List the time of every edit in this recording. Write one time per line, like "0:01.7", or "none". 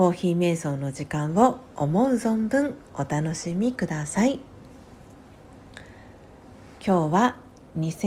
none